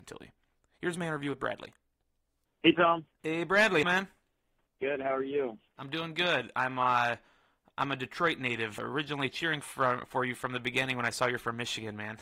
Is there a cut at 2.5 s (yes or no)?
no